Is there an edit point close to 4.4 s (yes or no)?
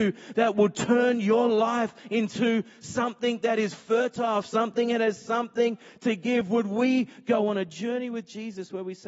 yes